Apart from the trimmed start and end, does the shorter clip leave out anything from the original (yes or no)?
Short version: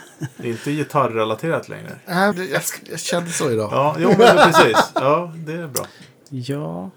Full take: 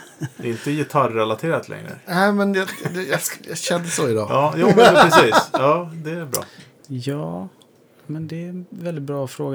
yes